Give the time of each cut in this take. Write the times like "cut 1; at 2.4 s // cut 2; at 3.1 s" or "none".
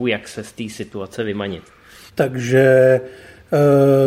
cut 1; at 2.1 s

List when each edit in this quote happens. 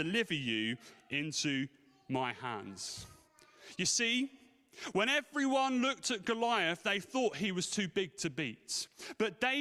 none

